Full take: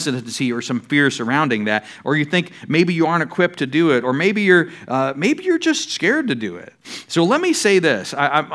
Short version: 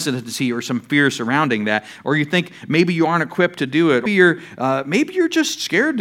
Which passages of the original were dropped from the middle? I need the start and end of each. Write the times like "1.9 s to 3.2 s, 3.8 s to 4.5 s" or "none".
4.1 s to 4.4 s